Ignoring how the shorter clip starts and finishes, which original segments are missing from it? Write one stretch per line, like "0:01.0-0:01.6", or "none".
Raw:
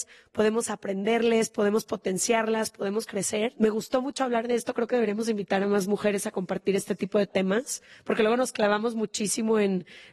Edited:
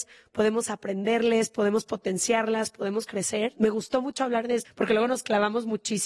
0:04.7-0:07.9